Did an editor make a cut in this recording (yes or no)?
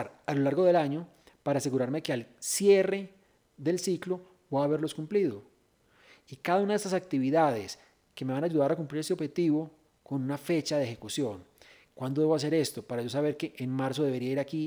no